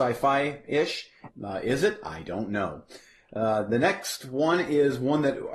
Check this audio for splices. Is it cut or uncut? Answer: cut